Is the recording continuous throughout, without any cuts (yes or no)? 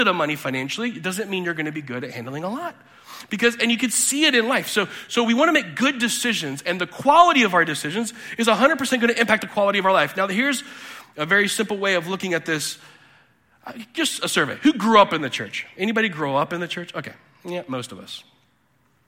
yes